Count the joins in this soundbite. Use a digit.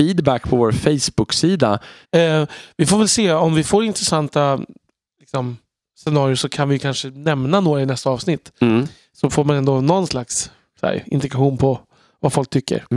1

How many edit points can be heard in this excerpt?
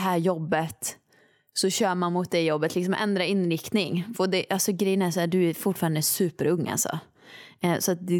0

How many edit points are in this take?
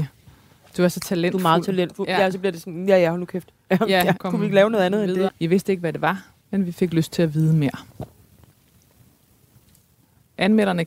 2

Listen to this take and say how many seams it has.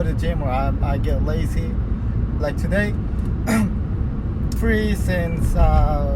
2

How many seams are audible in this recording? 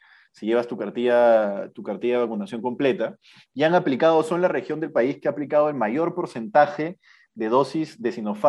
0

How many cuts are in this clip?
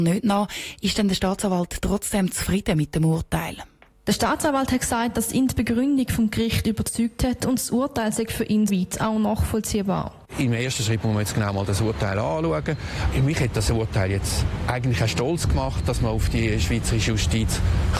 1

